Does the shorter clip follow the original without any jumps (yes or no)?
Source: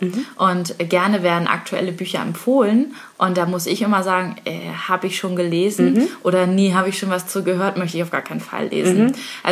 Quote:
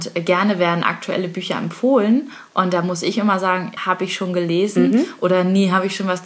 no